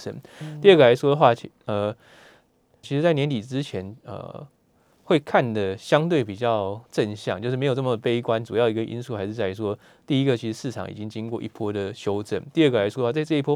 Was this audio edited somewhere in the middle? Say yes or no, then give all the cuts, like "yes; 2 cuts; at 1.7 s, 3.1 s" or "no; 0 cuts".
yes; 1 cut; at 2.8 s